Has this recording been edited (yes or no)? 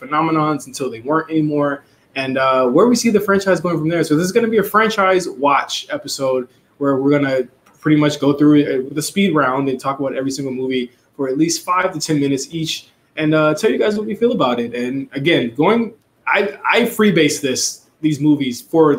yes